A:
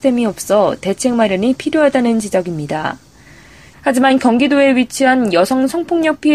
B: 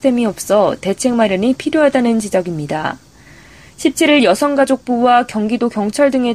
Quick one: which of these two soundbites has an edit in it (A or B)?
A